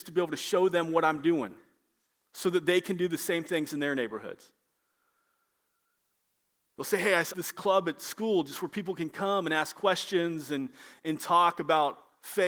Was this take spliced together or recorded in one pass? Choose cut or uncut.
cut